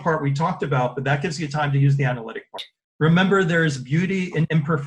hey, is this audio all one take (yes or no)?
yes